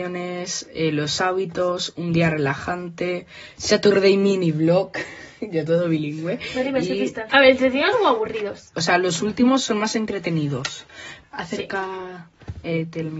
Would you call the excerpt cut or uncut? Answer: cut